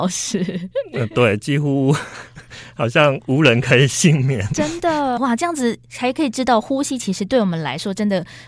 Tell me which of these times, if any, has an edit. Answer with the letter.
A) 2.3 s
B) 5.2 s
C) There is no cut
B